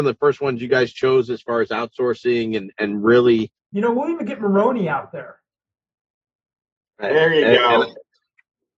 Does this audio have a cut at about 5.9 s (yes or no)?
no